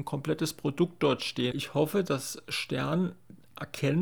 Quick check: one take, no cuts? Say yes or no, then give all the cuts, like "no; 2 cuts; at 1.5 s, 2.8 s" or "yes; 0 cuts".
no; 1 cut; at 1.5 s